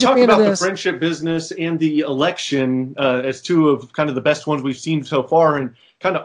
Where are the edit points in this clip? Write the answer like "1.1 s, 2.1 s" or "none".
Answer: none